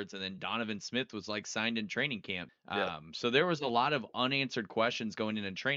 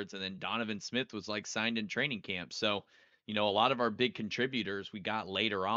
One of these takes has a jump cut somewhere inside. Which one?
first; 1 cut; at 2.5 s

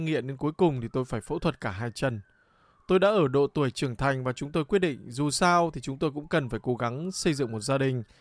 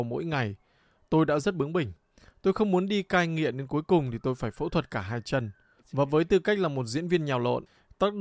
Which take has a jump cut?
second; 1 cut; at 5.8 s

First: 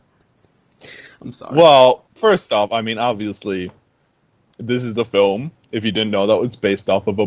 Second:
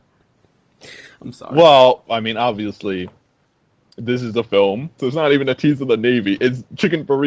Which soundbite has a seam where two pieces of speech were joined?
second; 2 cuts; at 2.1 s, 5.0 s

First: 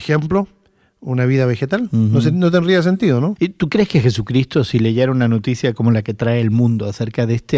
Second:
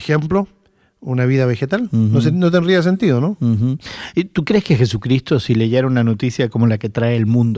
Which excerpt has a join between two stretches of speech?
first; 1 cut; at 3.4 s

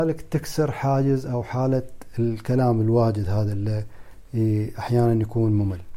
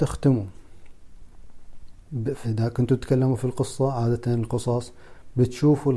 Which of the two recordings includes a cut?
second; 1 cut; at 2.4 s

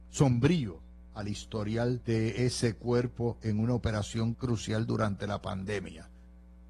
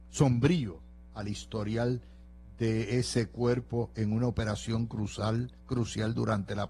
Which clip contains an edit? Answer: first; 2 cuts; at 2.0 s, 4.3 s

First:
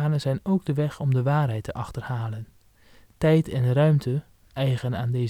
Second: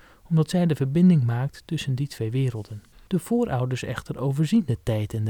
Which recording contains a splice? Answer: second; 1 cut; at 3.1 s

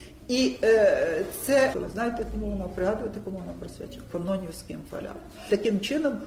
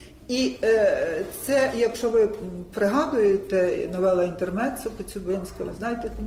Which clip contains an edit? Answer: first; 1 cut; at 1.7 s

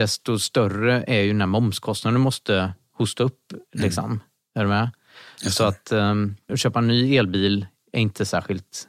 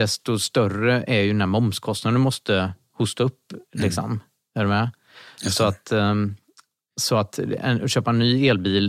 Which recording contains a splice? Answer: first; 1 cut; at 6.5 s

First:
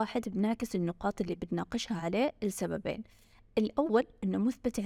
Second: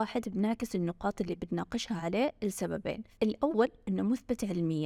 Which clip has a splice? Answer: second; 1 cut; at 3.1 s

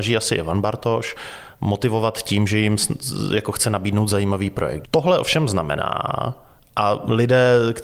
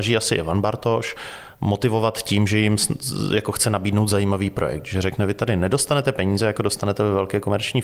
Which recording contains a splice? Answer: first; 1 cut; at 4.8 s

